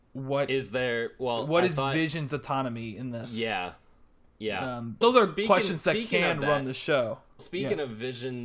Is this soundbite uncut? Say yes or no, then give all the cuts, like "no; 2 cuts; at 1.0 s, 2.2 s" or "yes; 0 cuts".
no; 2 cuts; at 5.0 s, 7.4 s